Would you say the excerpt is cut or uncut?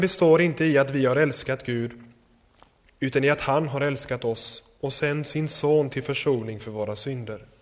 uncut